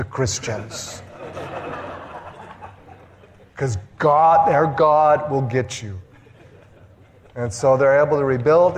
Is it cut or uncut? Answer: uncut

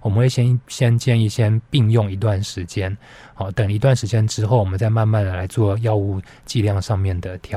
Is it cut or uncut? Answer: uncut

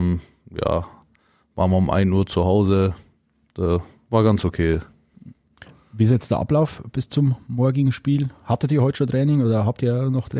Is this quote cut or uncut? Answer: uncut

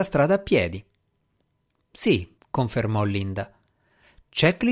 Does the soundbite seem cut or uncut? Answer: cut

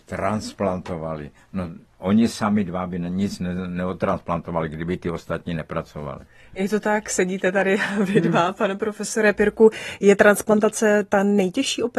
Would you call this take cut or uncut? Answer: uncut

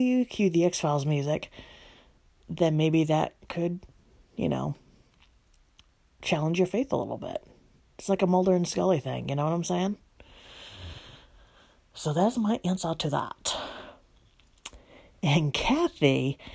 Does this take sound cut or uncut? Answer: uncut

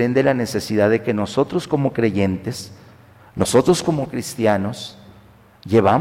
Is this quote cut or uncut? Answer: uncut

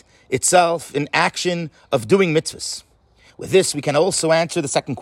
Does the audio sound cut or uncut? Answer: uncut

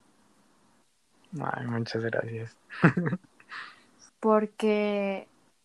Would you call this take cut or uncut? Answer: cut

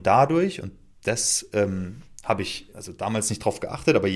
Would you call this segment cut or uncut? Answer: cut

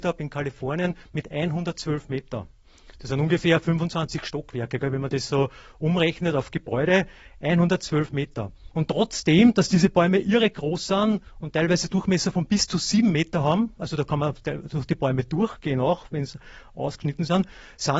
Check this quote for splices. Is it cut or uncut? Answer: cut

